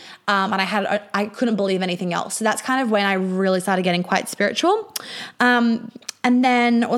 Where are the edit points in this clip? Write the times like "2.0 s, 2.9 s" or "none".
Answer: none